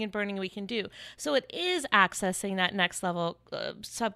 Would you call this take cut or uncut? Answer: uncut